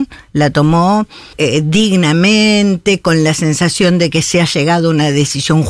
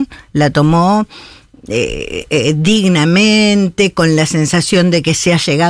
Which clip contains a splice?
first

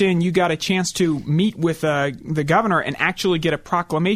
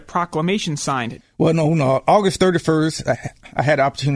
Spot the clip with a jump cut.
second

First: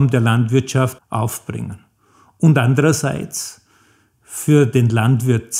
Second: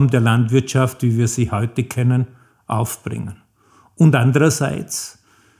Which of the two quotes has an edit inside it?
first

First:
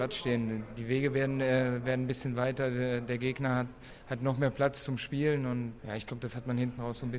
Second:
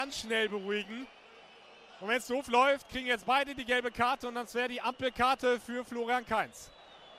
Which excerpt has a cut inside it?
first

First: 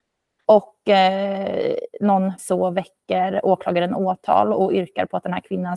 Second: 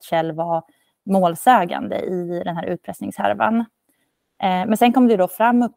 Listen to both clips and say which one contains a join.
first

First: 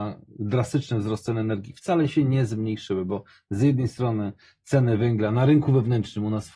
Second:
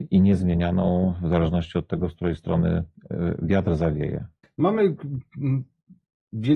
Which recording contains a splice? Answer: second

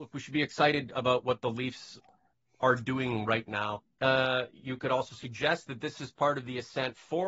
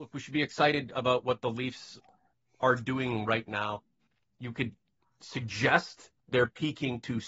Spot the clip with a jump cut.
first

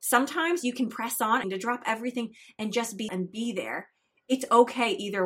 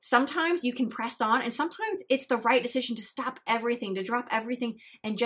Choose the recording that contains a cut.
first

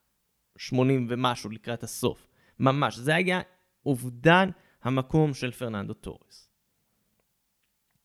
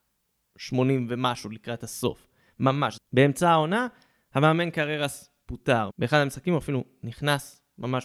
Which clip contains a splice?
second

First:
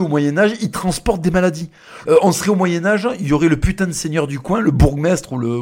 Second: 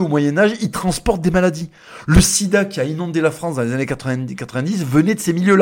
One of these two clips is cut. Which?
first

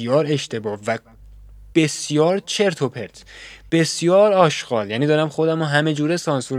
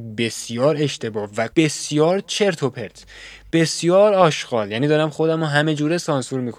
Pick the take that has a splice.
second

